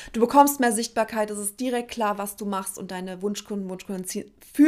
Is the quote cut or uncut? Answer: uncut